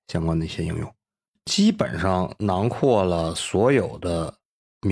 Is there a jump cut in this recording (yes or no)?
no